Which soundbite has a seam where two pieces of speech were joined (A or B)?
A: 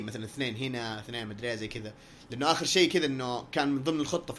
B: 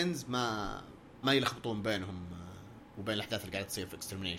B